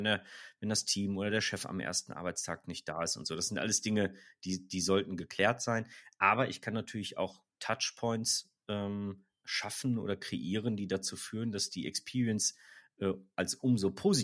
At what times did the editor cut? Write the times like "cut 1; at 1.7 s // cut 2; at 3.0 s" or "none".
none

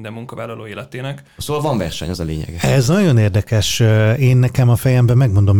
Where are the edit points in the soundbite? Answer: cut 1; at 1.4 s

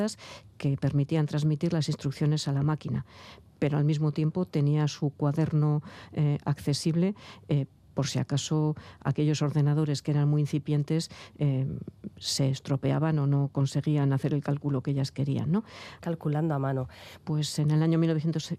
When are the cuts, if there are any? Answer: cut 1; at 16.0 s // cut 2; at 17.2 s

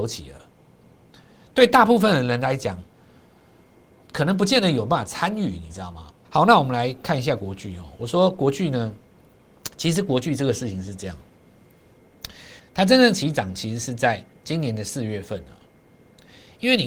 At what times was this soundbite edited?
cut 1; at 6.2 s // cut 2; at 12.6 s

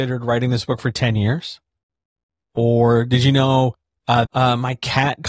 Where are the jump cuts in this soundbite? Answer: cut 1; at 4.3 s

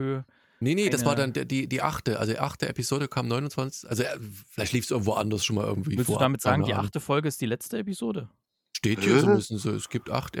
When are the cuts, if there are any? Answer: none

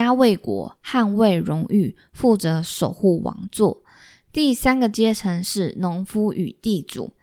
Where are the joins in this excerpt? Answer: none

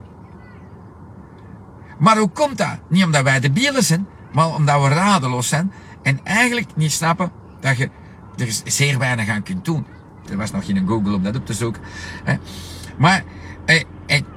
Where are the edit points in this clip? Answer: cut 1; at 10.3 s

